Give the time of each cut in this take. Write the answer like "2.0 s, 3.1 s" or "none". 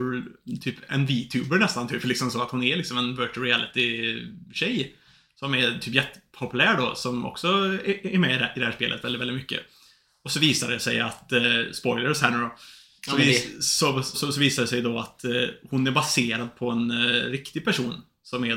14.1 s